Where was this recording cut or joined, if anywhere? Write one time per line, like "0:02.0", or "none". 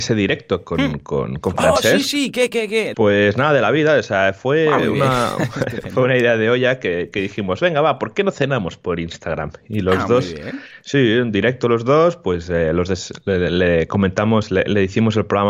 0:02.9

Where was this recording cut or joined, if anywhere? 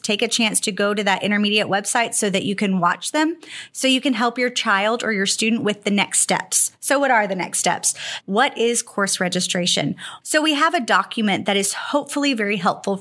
0:08.2
0:10.2

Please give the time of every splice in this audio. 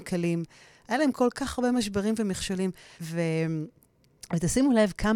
0:03.0

